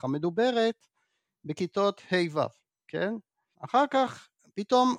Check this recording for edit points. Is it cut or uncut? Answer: cut